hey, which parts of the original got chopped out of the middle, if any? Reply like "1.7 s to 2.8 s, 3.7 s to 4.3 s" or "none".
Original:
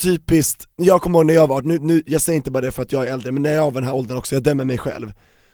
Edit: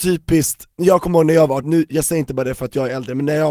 1.6 s to 1.8 s